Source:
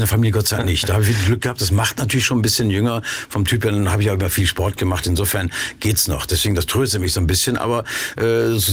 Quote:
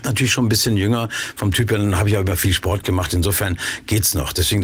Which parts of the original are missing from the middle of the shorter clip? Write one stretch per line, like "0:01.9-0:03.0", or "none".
none